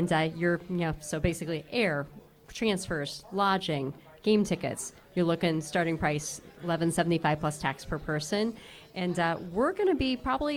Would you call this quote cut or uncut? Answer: uncut